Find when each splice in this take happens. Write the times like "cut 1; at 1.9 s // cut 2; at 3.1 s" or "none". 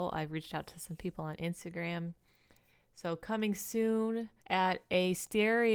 cut 1; at 4.4 s